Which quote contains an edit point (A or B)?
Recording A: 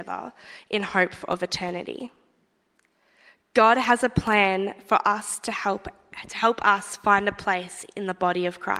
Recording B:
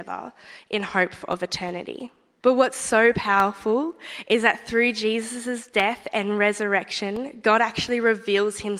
B